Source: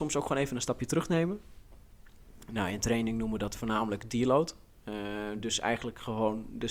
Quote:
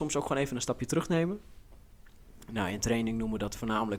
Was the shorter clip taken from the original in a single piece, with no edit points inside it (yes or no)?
yes